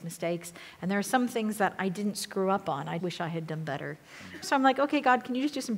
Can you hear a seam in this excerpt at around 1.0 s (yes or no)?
no